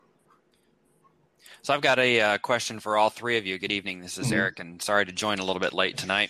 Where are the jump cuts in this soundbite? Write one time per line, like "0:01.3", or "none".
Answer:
none